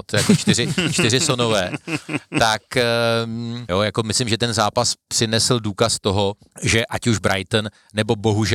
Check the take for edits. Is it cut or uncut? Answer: cut